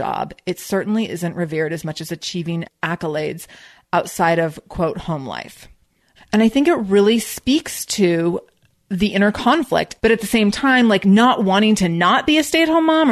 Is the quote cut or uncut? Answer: cut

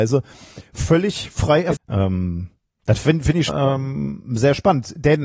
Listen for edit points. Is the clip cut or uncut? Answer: cut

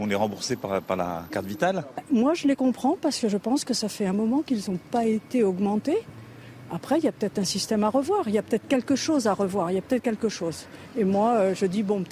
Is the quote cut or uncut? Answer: uncut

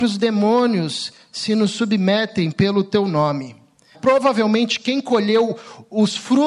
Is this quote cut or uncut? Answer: cut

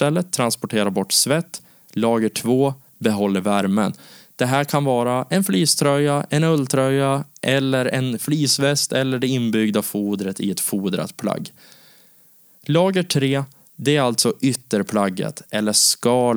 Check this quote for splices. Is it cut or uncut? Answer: uncut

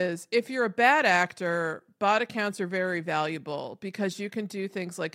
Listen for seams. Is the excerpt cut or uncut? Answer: uncut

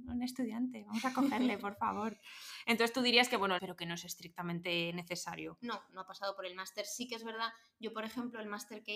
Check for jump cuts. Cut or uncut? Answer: cut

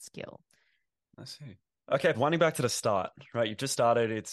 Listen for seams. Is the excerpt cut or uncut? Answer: cut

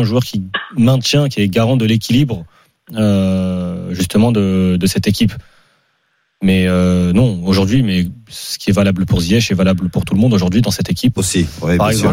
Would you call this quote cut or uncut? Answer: cut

